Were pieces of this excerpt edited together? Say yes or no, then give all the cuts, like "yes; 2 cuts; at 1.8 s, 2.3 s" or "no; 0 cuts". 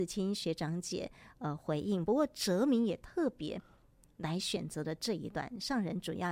no; 0 cuts